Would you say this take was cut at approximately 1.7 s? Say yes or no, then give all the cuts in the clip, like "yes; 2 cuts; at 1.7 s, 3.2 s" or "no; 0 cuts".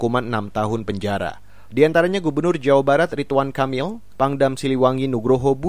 yes; 2 cuts; at 1.7 s, 4.2 s